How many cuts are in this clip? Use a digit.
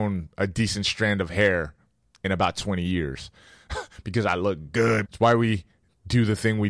1